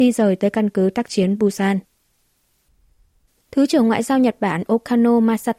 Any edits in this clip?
yes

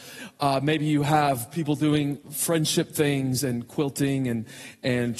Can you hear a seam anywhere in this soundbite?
yes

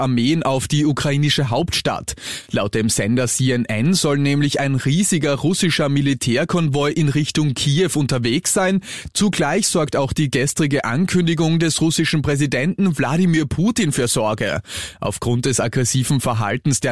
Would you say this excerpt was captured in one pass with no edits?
yes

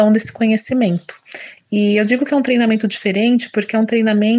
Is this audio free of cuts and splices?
no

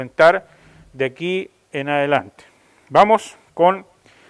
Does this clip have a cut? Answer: no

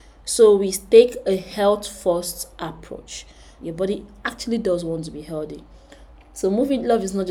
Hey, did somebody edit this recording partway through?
yes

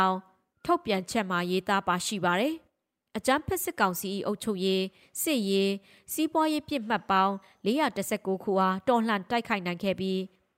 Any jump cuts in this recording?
no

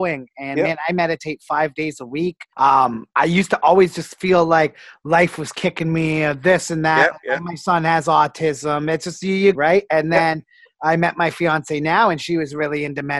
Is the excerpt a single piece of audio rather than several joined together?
no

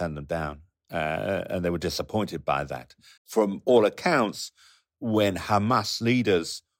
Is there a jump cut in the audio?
yes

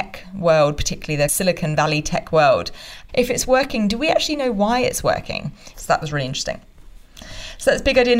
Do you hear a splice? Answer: yes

